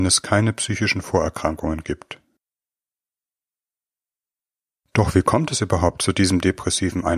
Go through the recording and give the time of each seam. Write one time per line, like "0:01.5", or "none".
none